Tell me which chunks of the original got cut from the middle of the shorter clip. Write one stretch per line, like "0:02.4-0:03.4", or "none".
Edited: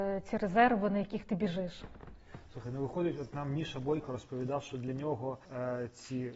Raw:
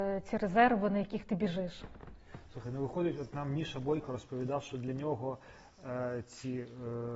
0:05.5-0:05.8